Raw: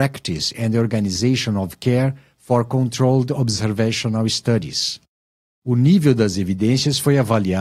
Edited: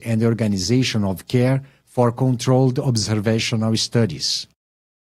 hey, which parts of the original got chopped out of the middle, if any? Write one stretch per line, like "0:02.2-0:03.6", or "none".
none